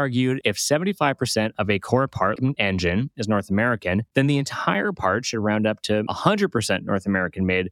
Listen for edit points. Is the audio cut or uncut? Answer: cut